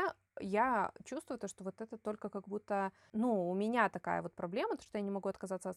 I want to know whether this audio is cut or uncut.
uncut